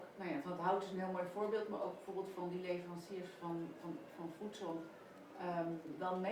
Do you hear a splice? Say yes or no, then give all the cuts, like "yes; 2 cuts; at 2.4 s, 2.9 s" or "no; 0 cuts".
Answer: no; 0 cuts